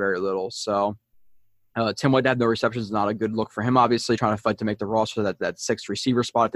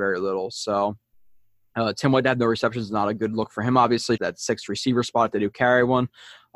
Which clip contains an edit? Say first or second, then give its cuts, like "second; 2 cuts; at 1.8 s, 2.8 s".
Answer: second; 1 cut; at 4.2 s